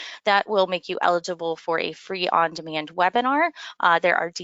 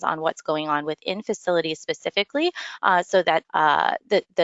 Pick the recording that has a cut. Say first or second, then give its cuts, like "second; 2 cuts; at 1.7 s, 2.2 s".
second; 1 cut; at 3.4 s